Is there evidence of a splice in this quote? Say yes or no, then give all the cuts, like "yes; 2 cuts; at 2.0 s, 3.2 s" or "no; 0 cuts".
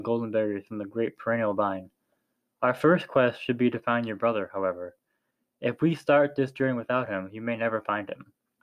no; 0 cuts